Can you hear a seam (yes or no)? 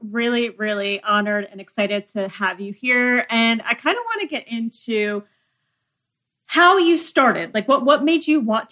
no